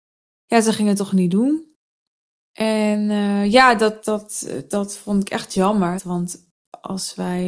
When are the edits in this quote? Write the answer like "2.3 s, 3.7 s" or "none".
4.0 s, 6.0 s

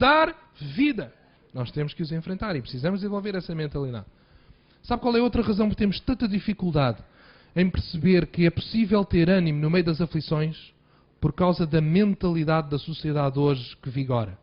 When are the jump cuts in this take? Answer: 1.4 s

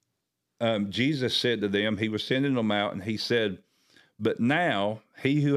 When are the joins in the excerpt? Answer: none

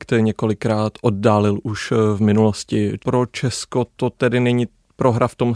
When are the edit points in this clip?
3.0 s

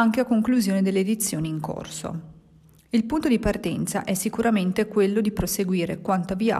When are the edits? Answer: none

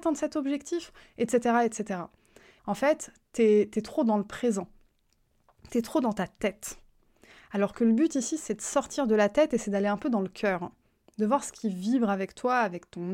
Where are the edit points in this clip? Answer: 2.6 s

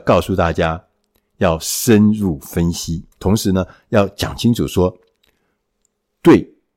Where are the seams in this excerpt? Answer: 3.1 s

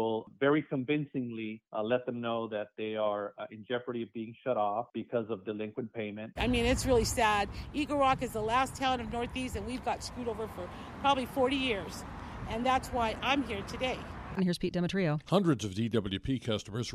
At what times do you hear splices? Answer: 6.4 s, 14.4 s

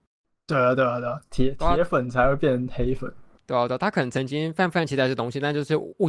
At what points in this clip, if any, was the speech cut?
none

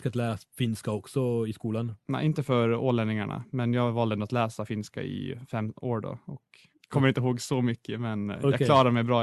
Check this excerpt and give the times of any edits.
6.7 s

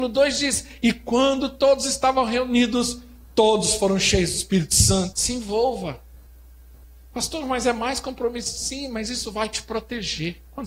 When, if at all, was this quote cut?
5.1 s

